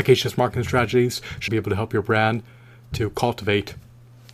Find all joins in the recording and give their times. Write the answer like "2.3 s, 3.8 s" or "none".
1.5 s